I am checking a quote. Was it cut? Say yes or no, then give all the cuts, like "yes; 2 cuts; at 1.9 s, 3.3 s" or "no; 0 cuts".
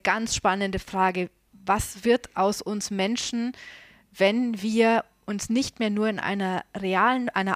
no; 0 cuts